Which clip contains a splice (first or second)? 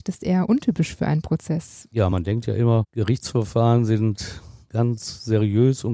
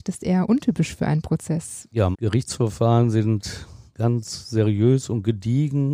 second